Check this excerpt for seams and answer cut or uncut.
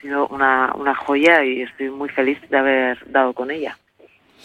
uncut